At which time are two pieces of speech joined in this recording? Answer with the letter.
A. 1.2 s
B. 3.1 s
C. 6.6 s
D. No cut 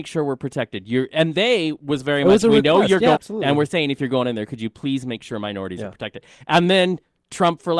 B